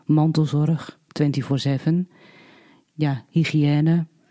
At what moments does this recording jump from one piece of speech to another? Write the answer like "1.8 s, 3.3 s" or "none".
none